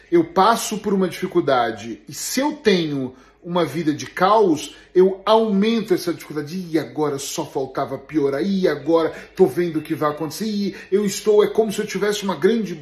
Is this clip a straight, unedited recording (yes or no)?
yes